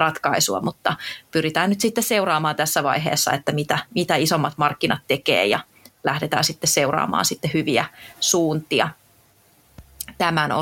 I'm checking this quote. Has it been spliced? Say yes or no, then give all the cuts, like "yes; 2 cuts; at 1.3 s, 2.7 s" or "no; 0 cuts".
no; 0 cuts